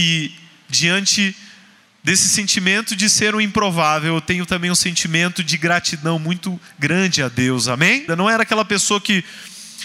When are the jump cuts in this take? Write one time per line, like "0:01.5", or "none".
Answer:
0:08.1